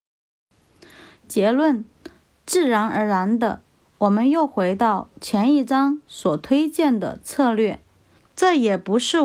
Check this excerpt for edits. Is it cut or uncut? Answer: cut